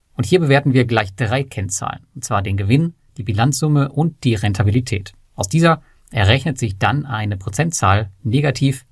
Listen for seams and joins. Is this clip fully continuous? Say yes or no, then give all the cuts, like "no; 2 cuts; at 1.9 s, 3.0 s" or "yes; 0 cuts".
yes; 0 cuts